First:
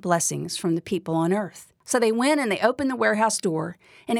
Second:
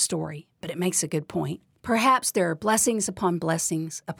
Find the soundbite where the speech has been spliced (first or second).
first